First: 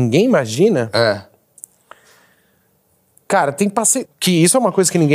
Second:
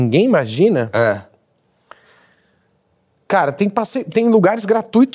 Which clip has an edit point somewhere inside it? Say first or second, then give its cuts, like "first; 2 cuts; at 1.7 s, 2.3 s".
first; 1 cut; at 4.0 s